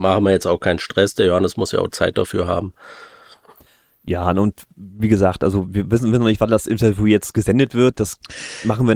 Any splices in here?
no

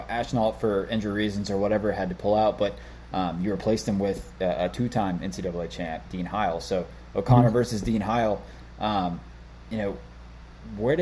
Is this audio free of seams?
yes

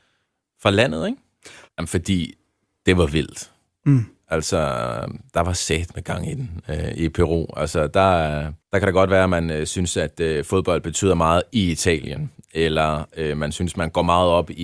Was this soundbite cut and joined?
yes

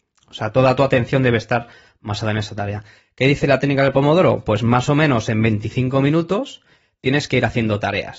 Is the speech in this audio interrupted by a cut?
no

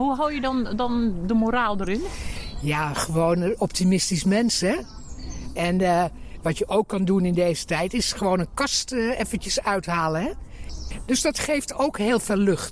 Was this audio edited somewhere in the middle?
no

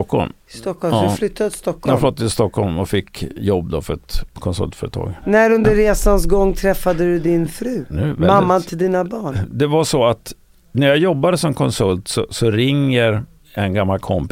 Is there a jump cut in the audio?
no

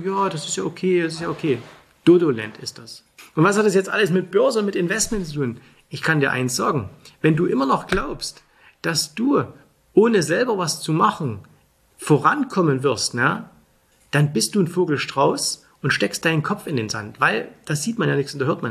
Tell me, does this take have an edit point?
no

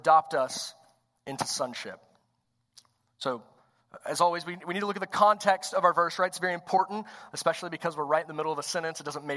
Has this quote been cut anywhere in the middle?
no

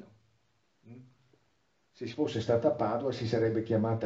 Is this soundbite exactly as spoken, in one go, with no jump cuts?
yes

